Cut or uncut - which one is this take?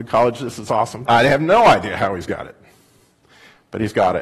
cut